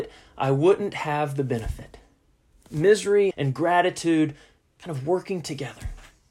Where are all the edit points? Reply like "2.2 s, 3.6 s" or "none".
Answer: 3.3 s

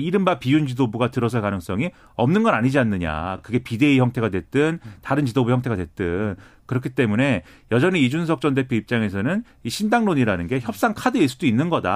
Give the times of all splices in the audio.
none

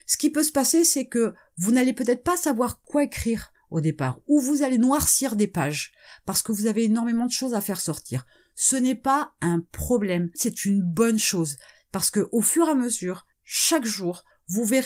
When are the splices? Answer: 10.3 s

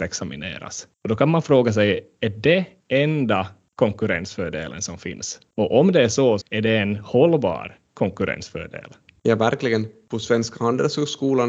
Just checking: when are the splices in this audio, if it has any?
6.4 s

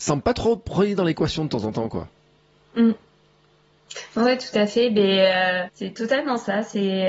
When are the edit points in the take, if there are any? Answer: 5.7 s

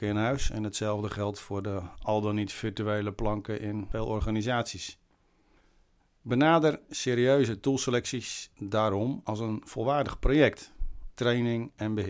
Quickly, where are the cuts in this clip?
11.1 s

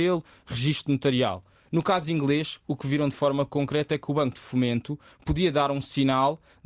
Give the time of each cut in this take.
none

